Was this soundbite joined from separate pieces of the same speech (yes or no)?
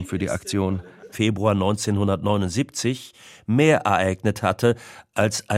yes